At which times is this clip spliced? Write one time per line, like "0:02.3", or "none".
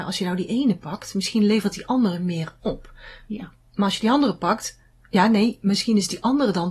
none

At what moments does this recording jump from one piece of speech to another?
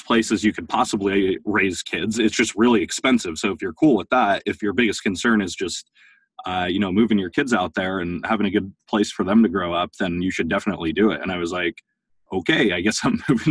none

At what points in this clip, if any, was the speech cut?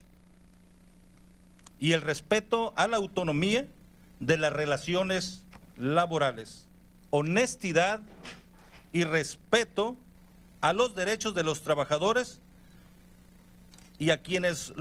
0:07.0

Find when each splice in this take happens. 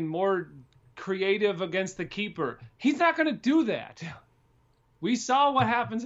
none

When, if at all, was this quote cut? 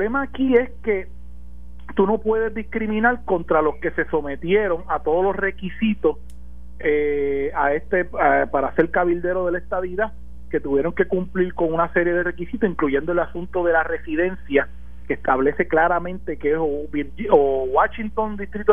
none

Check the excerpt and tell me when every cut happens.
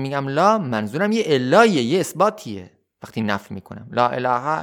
none

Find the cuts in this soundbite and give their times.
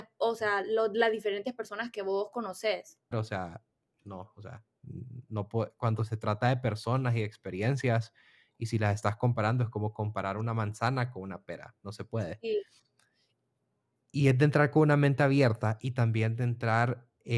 0:03.1

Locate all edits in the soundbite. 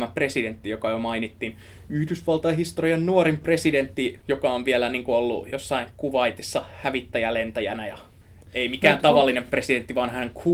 none

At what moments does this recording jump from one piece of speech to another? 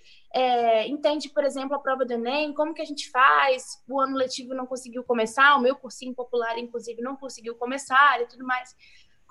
none

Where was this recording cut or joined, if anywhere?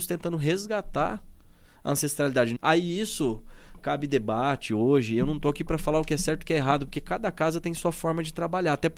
0:02.6

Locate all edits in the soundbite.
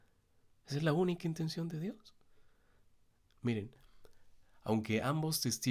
none

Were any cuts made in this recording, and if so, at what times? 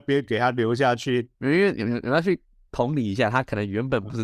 0:01.3

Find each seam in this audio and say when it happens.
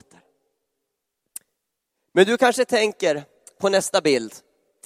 none

